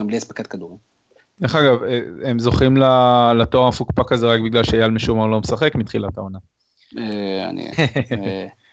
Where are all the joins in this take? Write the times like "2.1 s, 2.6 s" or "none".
7.7 s